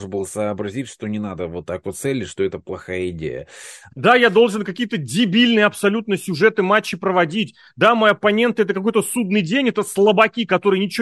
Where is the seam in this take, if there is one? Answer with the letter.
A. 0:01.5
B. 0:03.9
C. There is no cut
B